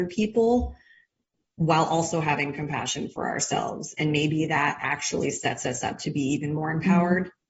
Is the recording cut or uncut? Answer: uncut